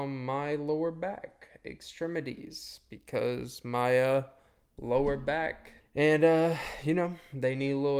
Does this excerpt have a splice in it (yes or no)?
yes